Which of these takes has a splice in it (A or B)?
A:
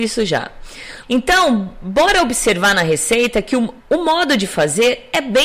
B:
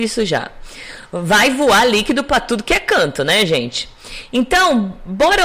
A